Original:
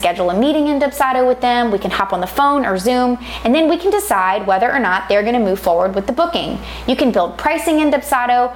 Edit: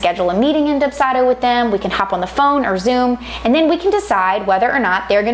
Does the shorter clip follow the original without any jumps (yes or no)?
yes